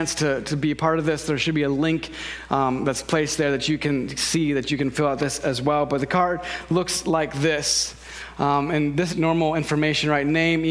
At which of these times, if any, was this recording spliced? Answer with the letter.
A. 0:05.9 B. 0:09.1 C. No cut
B